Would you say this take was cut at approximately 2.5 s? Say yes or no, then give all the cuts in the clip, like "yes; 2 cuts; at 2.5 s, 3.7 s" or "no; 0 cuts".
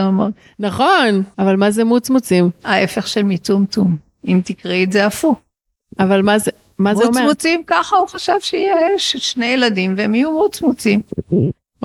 no; 1 cut; at 1.3 s